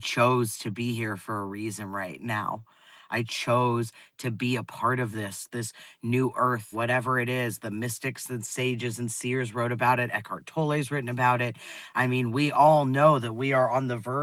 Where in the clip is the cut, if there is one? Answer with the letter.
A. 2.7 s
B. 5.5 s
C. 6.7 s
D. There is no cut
C